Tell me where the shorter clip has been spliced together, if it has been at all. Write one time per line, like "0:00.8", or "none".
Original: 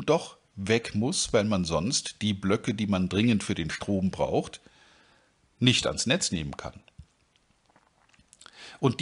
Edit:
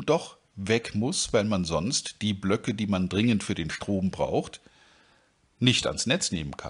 none